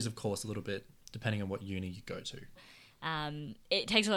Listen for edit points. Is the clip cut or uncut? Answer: cut